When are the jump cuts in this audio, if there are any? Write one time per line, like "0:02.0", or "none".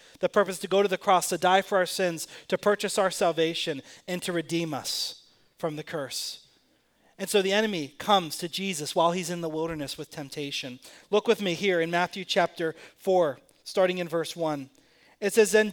none